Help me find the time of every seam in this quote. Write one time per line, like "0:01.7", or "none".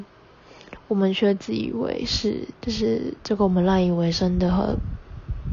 0:02.5